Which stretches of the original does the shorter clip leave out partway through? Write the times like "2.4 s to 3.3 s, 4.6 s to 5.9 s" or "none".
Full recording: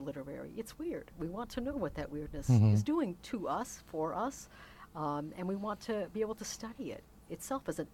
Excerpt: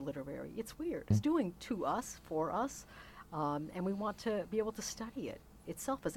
1.1 s to 2.7 s